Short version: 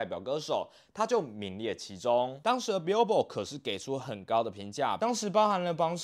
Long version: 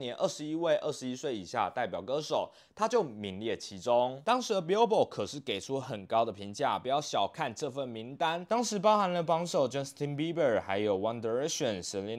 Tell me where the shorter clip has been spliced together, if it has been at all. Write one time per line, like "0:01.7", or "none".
0:05.0